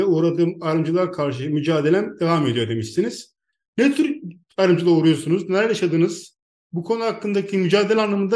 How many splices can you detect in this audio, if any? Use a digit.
0